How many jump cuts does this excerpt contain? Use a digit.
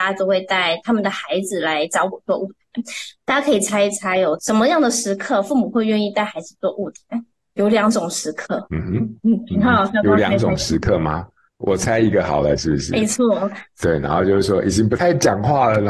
1